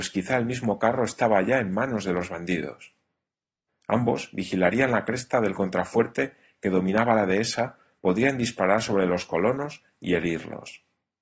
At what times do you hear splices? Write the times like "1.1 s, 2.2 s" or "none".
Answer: 3.7 s, 8.0 s